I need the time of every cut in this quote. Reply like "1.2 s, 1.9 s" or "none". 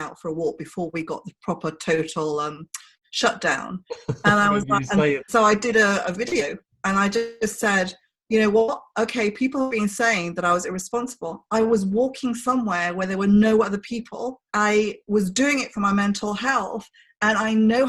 5.2 s, 14.5 s